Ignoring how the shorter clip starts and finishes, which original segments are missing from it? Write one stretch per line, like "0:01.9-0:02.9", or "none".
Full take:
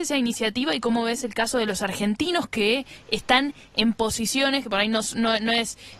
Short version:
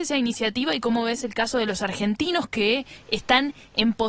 none